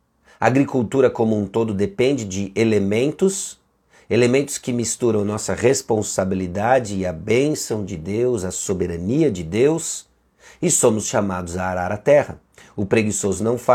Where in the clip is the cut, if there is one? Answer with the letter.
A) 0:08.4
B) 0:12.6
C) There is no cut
C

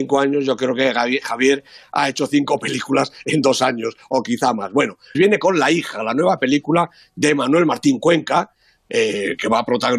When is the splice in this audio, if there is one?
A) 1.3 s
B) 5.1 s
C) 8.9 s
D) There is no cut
B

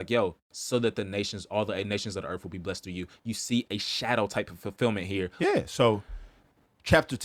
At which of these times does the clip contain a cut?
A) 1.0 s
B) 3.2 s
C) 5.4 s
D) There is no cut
C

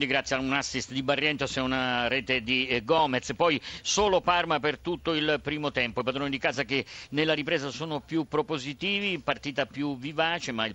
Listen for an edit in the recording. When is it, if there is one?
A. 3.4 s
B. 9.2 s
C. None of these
C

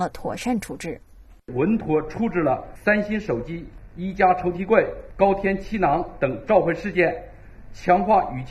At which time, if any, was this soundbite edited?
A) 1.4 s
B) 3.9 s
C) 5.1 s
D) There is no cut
D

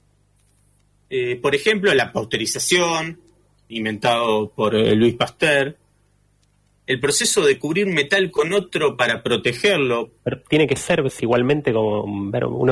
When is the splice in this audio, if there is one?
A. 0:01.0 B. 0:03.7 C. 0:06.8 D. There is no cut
B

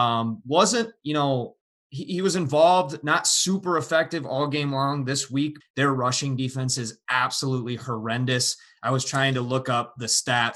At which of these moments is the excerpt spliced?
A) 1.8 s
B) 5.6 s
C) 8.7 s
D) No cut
B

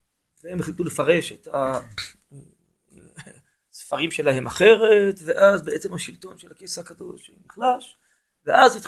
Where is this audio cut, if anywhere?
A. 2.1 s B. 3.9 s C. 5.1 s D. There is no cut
D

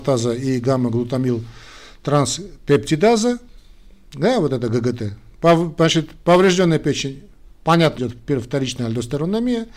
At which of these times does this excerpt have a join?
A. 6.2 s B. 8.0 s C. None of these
B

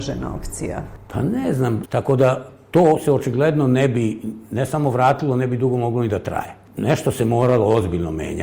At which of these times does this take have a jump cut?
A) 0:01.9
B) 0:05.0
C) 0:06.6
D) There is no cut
A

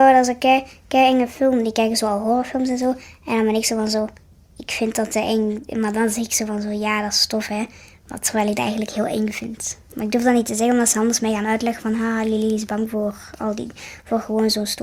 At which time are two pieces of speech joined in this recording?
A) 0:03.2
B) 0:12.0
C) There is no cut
C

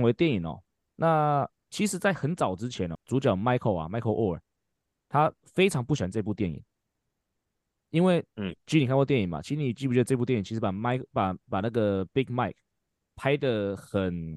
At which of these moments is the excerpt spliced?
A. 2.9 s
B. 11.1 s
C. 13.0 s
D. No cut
A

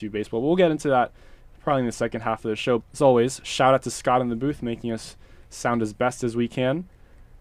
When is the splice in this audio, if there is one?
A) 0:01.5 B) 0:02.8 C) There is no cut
B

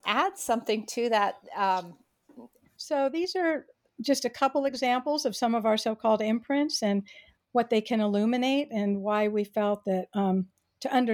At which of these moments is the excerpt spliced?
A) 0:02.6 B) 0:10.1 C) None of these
A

